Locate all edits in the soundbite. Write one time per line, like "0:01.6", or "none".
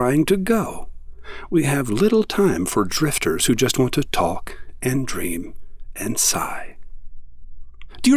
0:01.5